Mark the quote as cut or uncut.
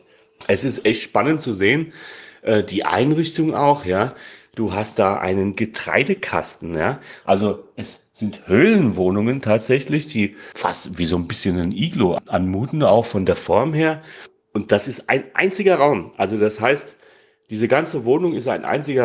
cut